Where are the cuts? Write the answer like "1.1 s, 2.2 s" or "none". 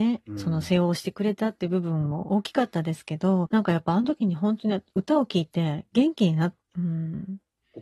3.5 s, 6.7 s